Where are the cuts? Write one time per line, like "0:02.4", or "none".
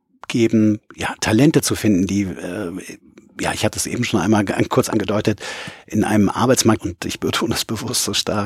0:06.8